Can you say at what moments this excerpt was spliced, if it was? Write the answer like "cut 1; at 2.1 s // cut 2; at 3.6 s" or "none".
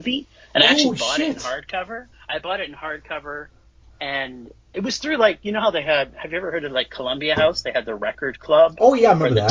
cut 1; at 2.1 s // cut 2; at 4.7 s

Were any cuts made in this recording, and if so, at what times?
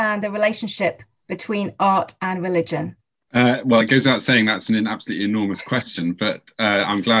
none

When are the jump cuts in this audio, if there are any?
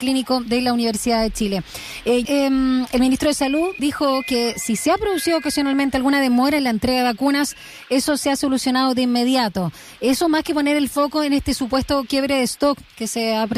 cut 1; at 2.3 s // cut 2; at 3.8 s

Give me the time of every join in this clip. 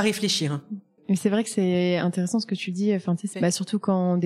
cut 1; at 1.0 s // cut 2; at 3.3 s

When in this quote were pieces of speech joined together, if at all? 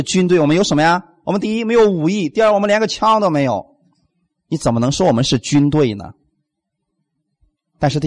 none

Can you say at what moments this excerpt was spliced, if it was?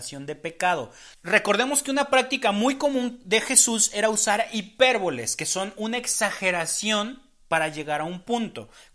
cut 1; at 1.1 s

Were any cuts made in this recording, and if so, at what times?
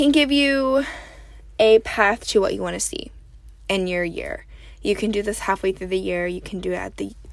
none

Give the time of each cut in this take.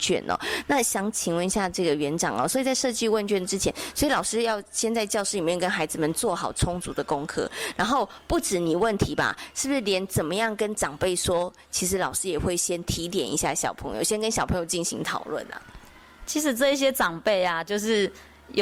none

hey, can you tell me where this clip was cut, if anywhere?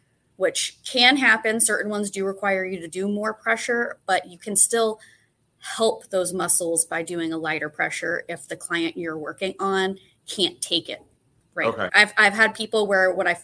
cut 1; at 11.9 s

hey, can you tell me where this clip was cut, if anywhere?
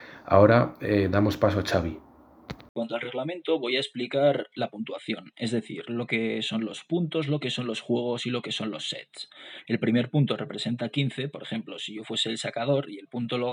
cut 1; at 9.6 s

